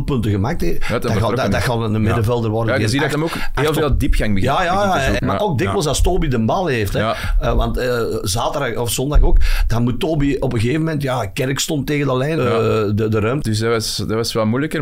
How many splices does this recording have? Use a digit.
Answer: 3